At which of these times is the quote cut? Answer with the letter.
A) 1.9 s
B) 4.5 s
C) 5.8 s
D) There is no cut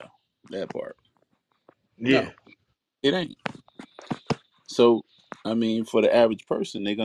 D